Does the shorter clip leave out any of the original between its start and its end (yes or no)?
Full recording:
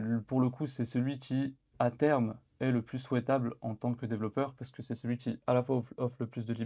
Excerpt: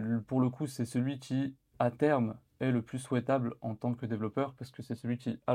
no